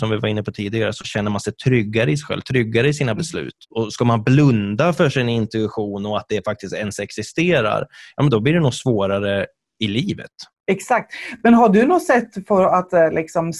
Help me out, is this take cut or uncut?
uncut